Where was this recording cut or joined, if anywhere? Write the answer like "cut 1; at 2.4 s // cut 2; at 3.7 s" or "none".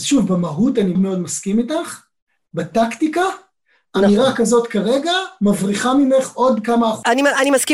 cut 1; at 0.9 s